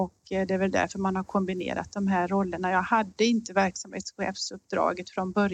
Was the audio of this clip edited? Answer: no; 0 cuts

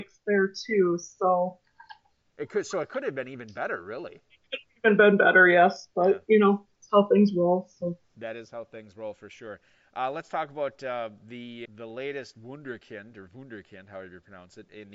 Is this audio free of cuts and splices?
no; 1 cut; at 11.7 s

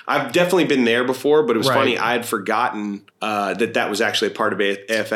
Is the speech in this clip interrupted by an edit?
yes; 1 cut; at 3.1 s

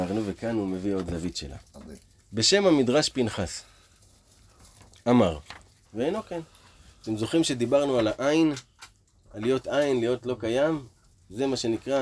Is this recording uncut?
no; 1 cut; at 5.8 s

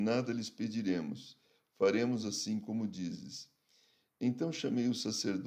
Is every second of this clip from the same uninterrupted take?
yes; 0 cuts

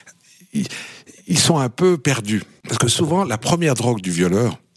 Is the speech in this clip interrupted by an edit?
no; 0 cuts

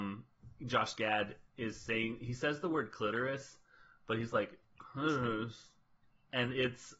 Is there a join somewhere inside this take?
no; 0 cuts

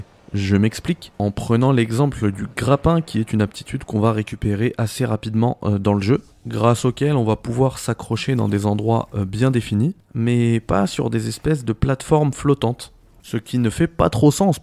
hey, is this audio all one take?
no; 1 cut; at 13.2 s

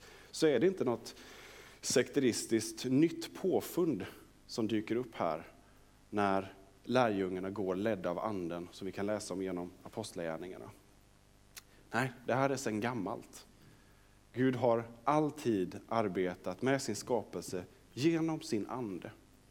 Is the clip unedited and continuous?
yes; 0 cuts

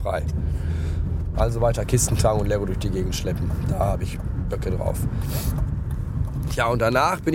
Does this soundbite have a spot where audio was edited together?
yes; 1 cut; at 1.3 s

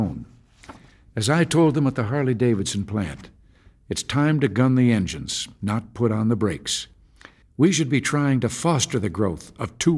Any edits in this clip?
yes; 1 cut; at 7.4 s

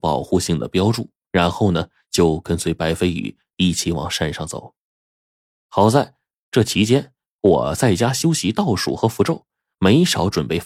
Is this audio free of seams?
yes; 0 cuts

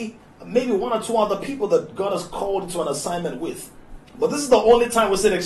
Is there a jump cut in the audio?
yes; 1 cut; at 4.1 s

